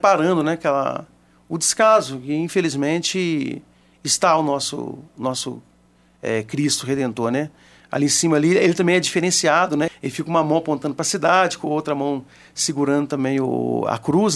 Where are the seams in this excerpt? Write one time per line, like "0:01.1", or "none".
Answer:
0:09.9